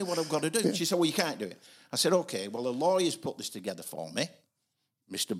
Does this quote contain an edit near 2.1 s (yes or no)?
no